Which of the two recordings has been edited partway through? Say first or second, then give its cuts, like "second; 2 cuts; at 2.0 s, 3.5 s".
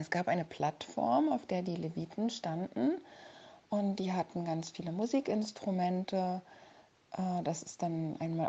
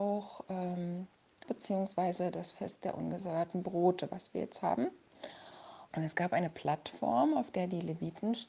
second; 2 cuts; at 1.4 s, 5.9 s